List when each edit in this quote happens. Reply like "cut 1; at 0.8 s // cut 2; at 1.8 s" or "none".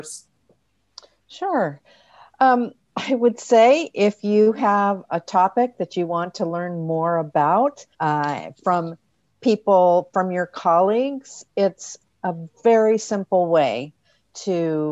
cut 1; at 7.9 s